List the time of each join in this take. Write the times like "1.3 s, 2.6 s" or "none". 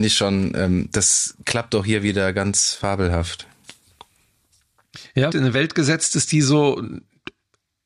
5.3 s